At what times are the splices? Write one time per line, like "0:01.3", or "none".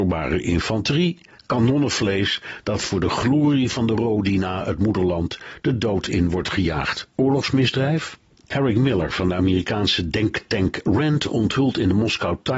0:07.1